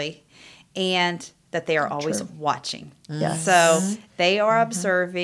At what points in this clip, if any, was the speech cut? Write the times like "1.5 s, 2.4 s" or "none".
none